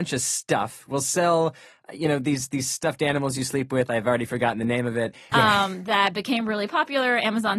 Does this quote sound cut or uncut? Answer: cut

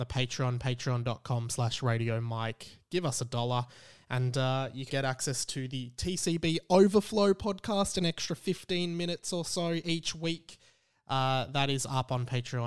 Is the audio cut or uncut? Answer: cut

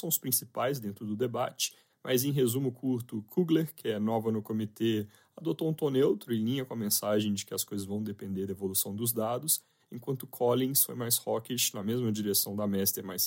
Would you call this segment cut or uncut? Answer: uncut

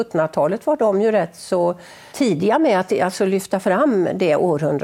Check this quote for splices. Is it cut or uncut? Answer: cut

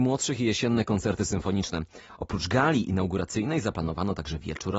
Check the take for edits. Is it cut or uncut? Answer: uncut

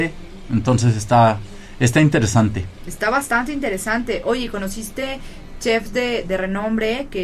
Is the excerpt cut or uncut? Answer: uncut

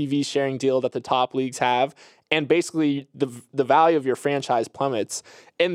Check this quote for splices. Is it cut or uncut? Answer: uncut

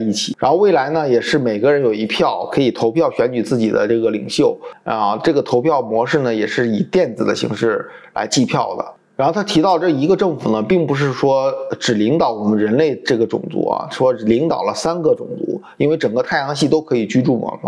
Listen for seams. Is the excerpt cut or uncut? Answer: uncut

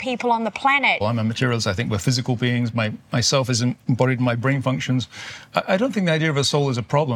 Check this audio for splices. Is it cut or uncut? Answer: cut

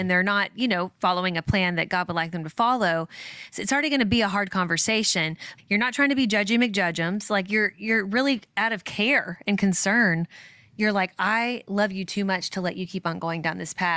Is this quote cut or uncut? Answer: cut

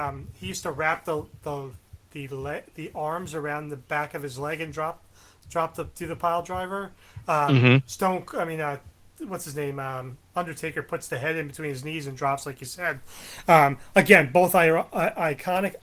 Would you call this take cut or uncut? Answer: uncut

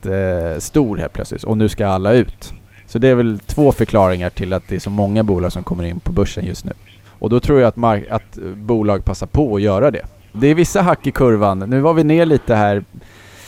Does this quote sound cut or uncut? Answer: cut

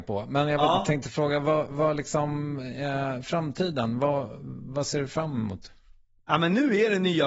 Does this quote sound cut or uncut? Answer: uncut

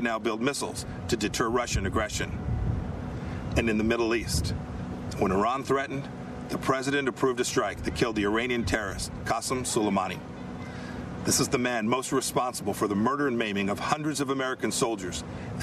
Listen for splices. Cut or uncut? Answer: uncut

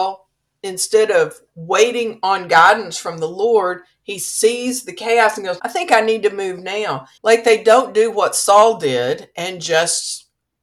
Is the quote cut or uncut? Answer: cut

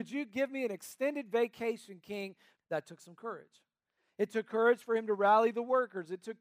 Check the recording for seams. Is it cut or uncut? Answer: cut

